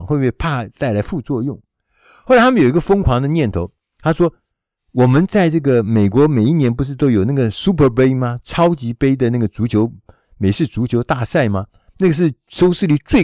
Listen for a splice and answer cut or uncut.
uncut